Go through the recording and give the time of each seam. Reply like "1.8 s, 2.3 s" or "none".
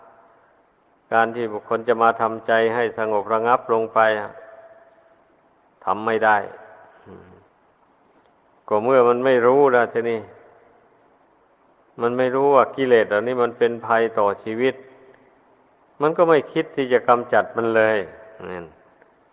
none